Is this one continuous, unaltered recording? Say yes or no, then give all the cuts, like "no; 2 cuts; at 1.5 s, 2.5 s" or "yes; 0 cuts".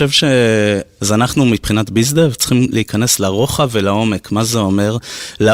no; 1 cut; at 1.0 s